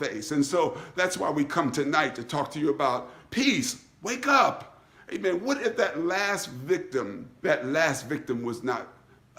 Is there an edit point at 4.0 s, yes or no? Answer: no